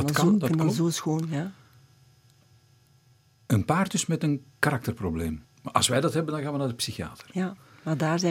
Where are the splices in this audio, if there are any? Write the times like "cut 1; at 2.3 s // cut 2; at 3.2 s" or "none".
cut 1; at 5.4 s